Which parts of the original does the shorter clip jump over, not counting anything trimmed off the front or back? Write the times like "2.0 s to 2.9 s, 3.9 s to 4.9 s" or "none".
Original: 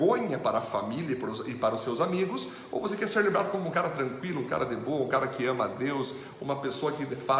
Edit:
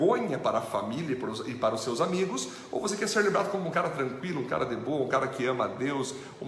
none